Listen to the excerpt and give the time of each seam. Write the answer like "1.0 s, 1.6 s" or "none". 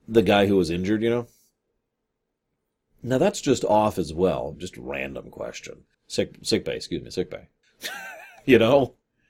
4.5 s, 5.9 s, 7.6 s